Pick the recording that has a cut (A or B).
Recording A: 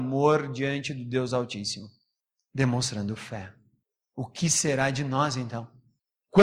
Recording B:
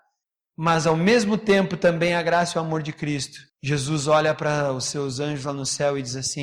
B